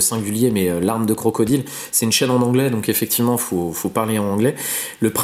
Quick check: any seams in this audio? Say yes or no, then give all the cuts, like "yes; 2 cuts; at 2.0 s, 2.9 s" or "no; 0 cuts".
no; 0 cuts